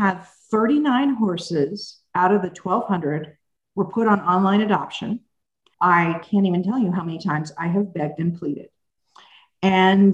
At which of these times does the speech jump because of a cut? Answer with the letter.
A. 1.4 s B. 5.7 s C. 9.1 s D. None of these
B